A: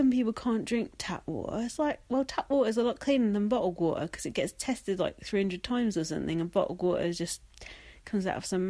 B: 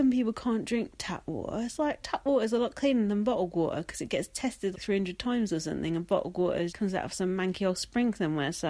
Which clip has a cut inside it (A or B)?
B